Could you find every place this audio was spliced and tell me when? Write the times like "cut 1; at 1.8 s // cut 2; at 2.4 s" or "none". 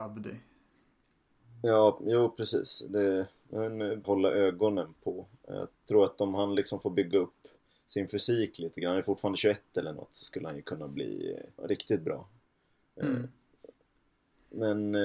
cut 1; at 4.0 s // cut 2; at 11.6 s